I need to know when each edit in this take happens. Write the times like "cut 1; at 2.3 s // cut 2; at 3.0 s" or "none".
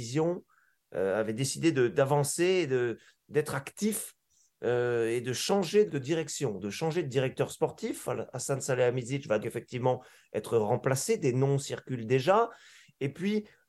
cut 1; at 5.9 s // cut 2; at 9.4 s